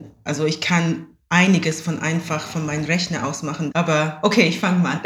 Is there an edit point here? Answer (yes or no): yes